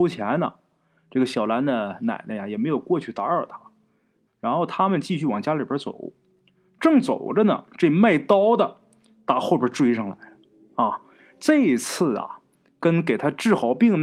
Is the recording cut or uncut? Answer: cut